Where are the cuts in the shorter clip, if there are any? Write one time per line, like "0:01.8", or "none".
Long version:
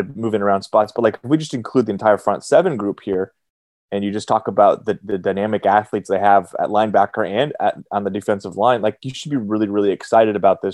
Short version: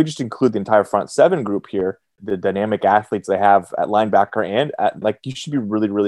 0:02.2
0:05.0

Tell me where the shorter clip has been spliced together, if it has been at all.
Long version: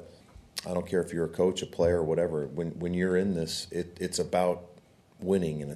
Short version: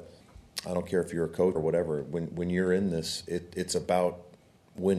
0:01.6

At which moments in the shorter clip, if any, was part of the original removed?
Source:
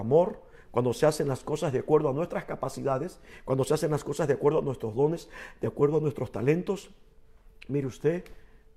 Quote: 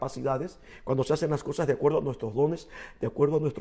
none

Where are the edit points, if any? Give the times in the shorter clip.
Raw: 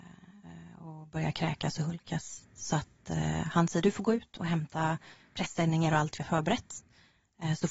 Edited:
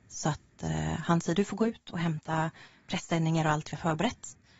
none

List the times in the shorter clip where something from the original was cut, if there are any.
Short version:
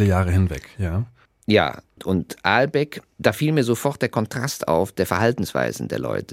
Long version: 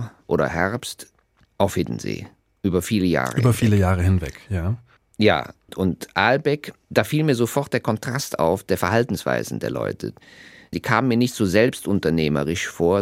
none

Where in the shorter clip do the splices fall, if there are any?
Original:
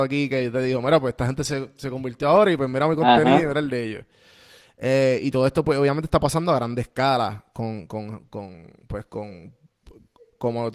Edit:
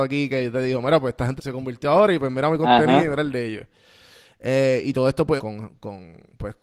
0:01.4
0:05.4

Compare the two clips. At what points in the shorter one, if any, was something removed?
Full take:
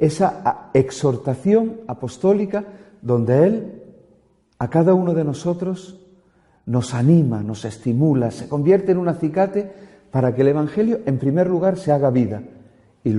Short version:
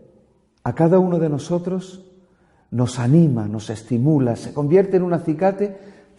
none

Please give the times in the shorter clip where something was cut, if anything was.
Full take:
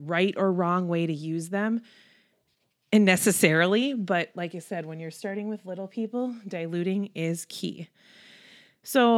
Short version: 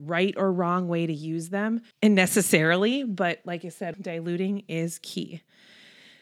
0:01.9
0:03.9

